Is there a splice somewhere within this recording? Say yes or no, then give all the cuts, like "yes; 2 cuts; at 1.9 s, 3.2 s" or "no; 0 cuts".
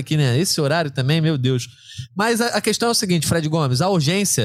no; 0 cuts